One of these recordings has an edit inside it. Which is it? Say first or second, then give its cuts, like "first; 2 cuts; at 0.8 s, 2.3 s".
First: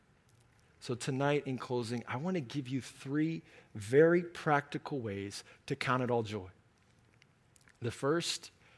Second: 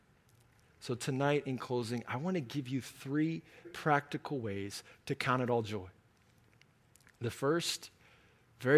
second; 1 cut; at 3.6 s